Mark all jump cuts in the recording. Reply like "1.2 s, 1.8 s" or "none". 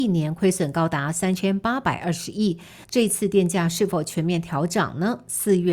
2.8 s